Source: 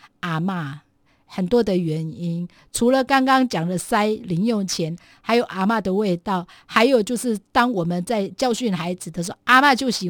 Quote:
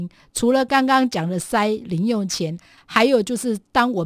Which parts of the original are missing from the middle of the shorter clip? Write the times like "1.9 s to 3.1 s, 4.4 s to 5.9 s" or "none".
5.2 s to 6.6 s